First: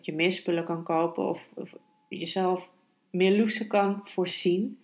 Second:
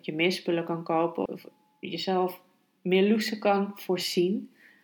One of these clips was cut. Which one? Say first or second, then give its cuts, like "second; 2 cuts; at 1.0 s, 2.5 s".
second; 1 cut; at 1.3 s